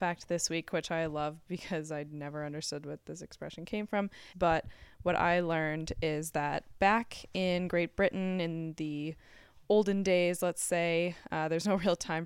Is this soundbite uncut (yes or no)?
no